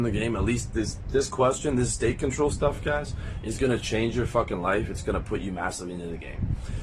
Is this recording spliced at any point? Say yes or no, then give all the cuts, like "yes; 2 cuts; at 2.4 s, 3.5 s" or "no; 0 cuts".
no; 0 cuts